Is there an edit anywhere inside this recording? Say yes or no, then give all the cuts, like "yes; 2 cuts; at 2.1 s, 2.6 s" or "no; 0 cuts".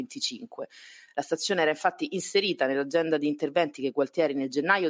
no; 0 cuts